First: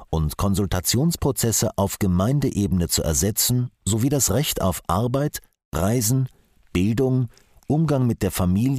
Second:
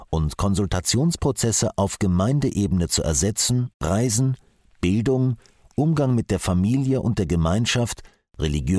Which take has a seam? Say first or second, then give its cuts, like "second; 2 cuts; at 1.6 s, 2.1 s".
second; 1 cut; at 3.7 s